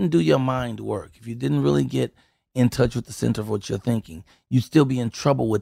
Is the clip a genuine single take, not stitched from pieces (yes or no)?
yes